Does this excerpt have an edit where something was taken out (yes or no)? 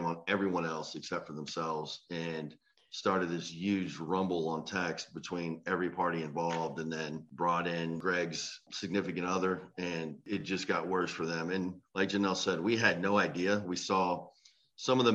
no